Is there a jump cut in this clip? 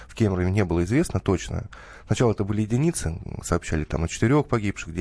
no; 0 cuts

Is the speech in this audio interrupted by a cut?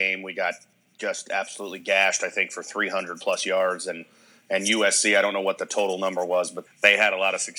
yes; 1 cut; at 6.7 s

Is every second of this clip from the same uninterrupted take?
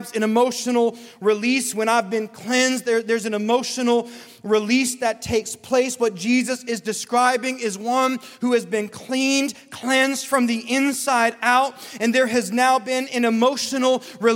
yes; 0 cuts

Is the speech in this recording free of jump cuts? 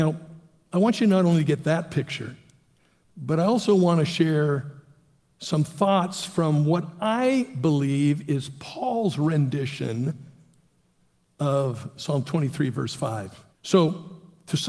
no; 1 cut; at 13.5 s

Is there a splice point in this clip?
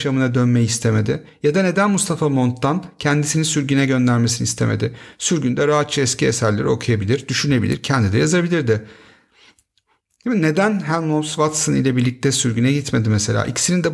no; 0 cuts

